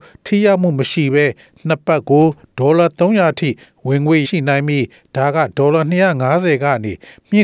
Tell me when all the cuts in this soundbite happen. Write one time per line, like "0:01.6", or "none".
0:04.2